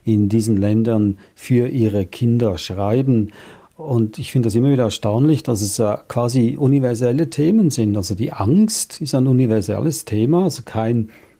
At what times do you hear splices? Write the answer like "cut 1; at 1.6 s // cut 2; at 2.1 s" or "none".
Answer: none